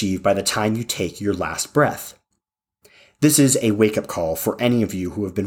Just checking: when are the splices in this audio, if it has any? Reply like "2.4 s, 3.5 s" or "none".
none